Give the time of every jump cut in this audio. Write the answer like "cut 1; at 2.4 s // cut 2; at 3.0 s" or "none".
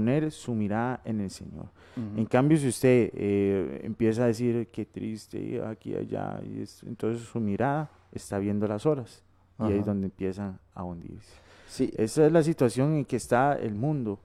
none